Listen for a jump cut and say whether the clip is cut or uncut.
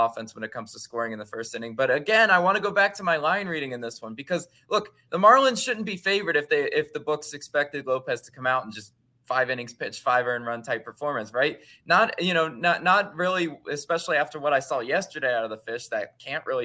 uncut